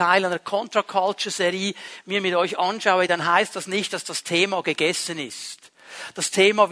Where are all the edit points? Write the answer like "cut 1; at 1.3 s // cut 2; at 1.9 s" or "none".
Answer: none